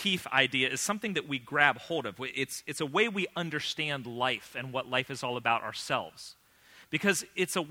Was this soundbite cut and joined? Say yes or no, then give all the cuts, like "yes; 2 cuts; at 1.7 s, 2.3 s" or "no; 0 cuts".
no; 0 cuts